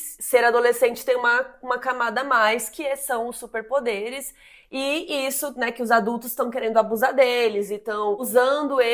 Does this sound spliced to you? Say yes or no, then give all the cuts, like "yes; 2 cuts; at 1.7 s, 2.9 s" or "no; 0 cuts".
no; 0 cuts